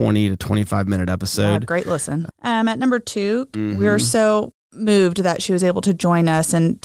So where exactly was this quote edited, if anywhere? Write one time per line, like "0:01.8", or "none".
0:02.3
0:03.5